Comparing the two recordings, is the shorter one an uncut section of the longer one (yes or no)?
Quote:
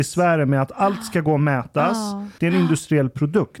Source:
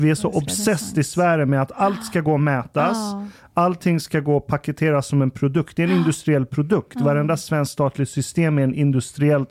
no